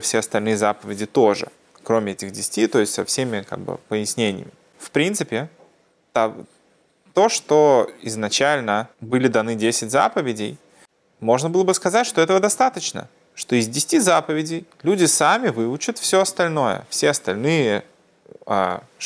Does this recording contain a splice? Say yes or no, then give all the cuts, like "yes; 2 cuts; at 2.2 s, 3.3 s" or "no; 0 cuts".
yes; 3 cuts; at 1.8 s, 4.7 s, 8.9 s